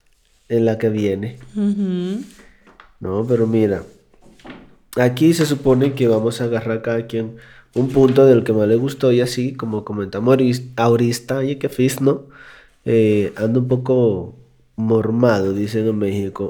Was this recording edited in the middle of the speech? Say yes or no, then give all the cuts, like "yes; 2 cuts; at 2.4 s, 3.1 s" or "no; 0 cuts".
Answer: no; 0 cuts